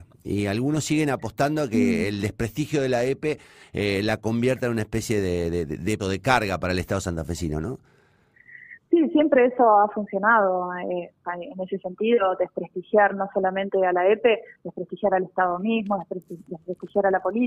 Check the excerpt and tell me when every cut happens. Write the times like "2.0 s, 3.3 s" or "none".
6.0 s